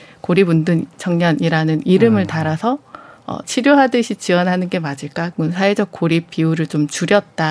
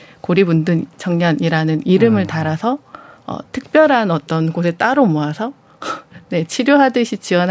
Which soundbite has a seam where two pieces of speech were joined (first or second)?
first